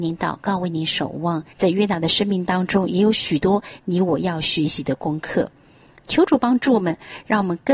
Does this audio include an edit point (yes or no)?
yes